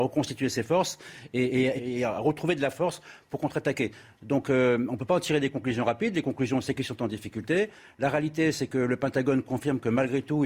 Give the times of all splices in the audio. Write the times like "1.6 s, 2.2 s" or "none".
1.8 s